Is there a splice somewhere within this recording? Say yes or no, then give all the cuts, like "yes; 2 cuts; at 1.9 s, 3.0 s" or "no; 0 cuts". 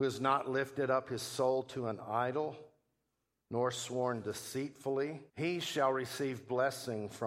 yes; 1 cut; at 5.3 s